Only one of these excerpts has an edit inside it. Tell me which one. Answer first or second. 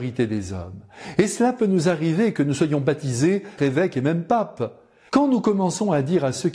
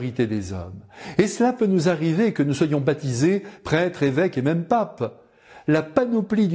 first